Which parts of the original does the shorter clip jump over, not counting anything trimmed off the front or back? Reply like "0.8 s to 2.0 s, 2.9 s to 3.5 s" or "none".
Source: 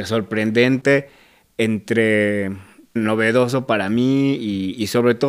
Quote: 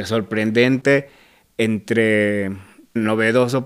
none